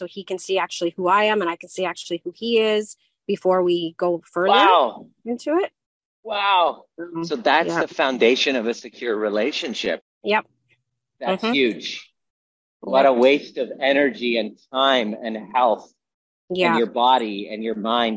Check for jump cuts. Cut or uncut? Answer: cut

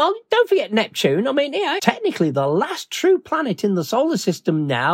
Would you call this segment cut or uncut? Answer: cut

